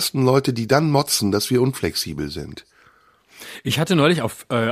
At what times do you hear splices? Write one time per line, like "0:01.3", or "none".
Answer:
none

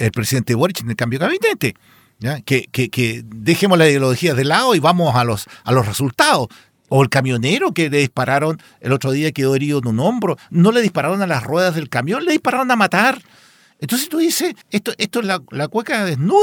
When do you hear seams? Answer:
0:06.7
0:14.6

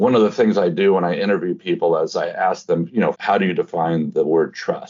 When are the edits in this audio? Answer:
0:03.1

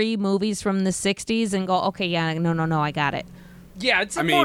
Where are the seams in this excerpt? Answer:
none

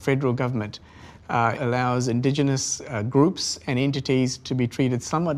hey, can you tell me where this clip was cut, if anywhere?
0:01.6

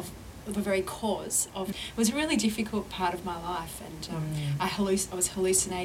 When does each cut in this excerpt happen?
0:01.7

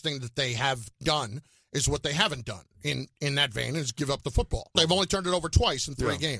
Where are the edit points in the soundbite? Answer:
0:04.7

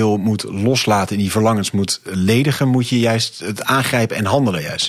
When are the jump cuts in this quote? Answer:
none

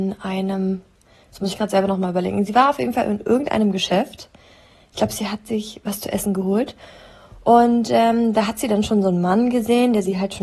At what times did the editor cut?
none

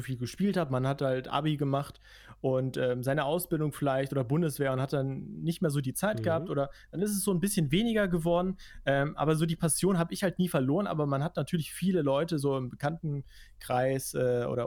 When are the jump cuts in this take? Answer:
none

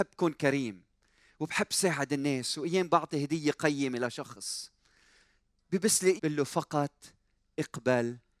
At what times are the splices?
0:06.2

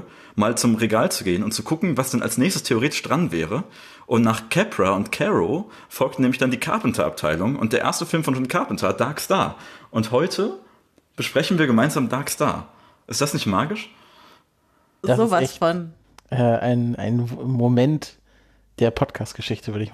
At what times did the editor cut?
none

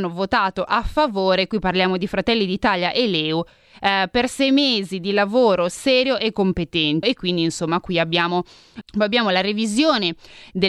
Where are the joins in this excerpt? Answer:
0:07.0
0:08.8

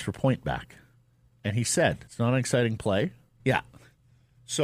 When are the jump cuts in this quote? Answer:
0:02.1
0:03.4

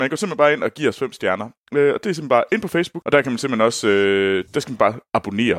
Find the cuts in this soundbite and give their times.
0:01.6
0:03.0
0:04.5

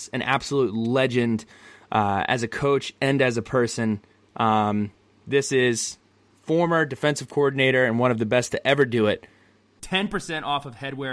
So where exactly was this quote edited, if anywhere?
0:09.8

